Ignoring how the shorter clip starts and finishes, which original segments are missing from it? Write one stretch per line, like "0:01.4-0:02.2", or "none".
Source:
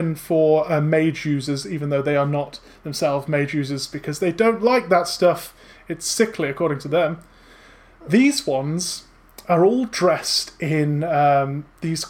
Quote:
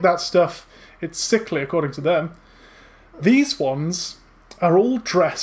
none

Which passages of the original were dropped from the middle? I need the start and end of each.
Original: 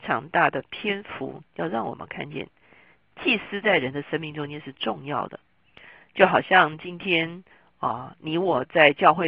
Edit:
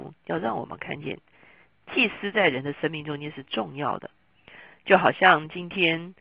none

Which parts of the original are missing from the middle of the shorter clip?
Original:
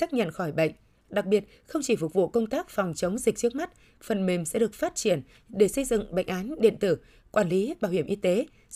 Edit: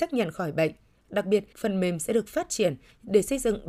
0:01.5-0:04.0

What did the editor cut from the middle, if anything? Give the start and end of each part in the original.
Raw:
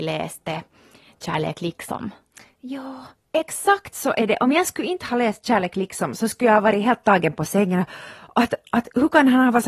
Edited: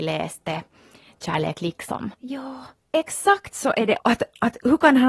0:02.1-0:02.5
0:04.4-0:08.3

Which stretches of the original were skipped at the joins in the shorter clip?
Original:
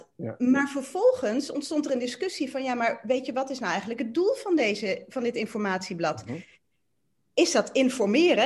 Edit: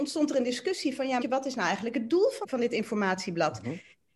0:02.8-0:03.3
0:04.5-0:05.1

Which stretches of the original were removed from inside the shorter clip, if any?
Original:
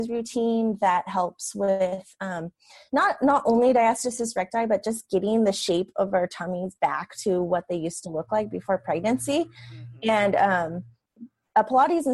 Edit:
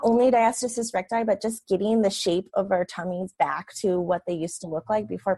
none

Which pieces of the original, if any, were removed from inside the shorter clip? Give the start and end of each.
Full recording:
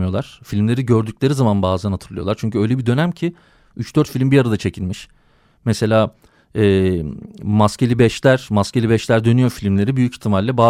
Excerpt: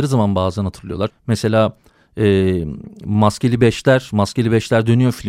0:02.4-0:05.5

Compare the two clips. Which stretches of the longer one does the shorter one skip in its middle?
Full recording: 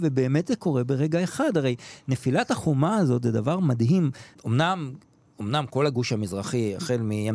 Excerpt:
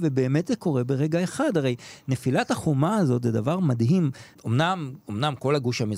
0:05.0-0:05.3

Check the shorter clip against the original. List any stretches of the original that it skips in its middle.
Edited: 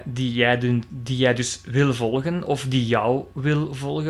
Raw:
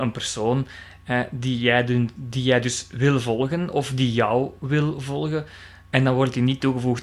none

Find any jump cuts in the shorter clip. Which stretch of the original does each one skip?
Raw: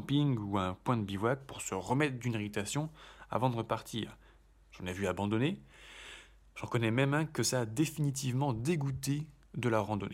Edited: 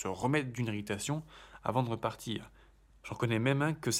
0:04.6-0:06.4

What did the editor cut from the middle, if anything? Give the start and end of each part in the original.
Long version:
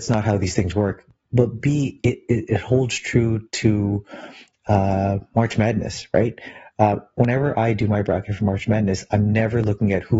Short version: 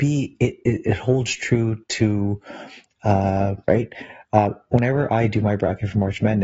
0:05.3-0:06.1

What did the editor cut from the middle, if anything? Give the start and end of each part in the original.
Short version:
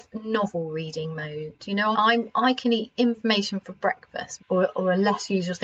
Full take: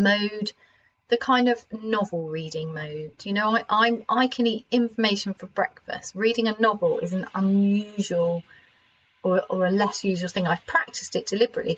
0:03.5-0:03.7
0:06.1-0:09.1

